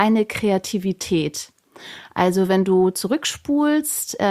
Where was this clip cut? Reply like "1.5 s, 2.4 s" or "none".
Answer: none